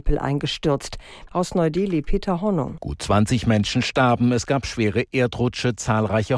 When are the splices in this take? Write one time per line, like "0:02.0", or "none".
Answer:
0:01.3
0:02.8